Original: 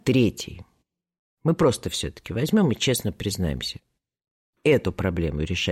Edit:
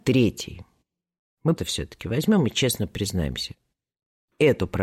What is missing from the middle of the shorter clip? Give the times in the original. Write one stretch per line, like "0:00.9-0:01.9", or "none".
0:01.6-0:01.8